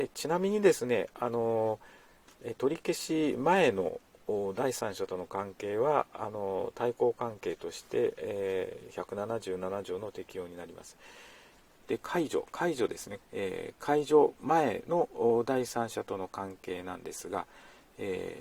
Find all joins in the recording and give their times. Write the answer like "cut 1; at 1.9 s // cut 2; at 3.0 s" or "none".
cut 1; at 11.8 s // cut 2; at 13.2 s